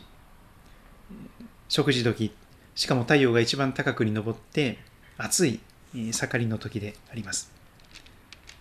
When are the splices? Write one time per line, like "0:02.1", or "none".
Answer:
none